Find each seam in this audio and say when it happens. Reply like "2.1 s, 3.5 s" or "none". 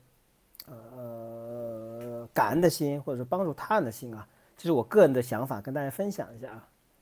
none